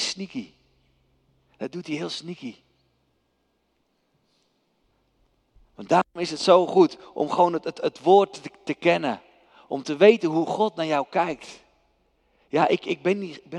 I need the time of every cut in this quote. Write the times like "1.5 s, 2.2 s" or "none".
none